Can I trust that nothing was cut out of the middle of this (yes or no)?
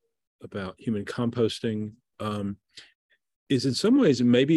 yes